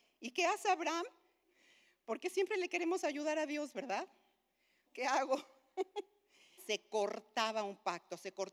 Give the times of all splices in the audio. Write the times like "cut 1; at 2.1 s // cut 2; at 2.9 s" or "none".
cut 1; at 1.4 s // cut 2; at 4.9 s // cut 3; at 6.6 s